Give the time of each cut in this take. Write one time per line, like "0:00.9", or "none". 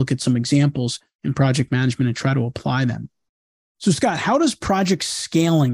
none